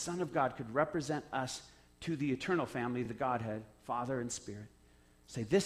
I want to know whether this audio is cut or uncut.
uncut